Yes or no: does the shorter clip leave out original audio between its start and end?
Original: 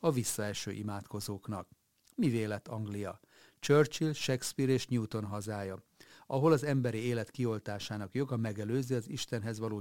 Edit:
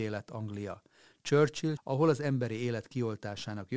yes